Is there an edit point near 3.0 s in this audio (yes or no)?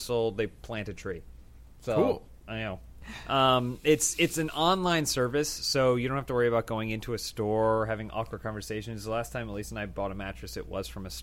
yes